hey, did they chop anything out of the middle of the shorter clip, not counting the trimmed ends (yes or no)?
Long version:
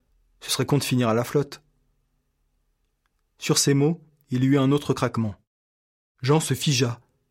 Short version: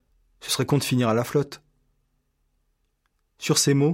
no